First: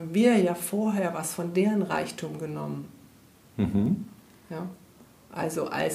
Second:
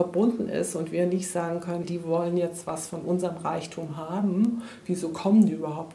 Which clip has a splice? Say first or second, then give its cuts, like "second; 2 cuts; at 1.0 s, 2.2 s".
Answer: second; 1 cut; at 1.8 s